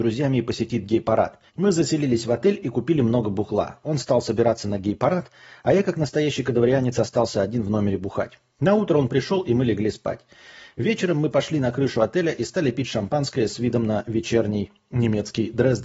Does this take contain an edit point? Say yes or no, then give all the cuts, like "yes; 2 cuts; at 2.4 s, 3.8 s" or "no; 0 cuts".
yes; 1 cut; at 1.5 s